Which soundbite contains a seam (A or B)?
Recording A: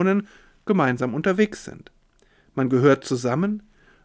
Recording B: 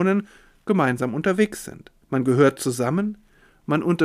B